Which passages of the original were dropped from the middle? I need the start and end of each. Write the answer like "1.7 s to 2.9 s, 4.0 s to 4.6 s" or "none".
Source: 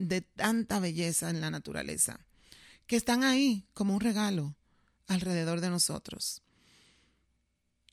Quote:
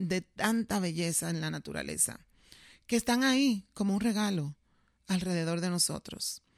none